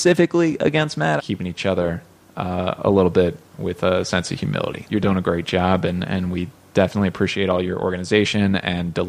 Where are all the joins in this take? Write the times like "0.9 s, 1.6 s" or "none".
1.2 s, 4.9 s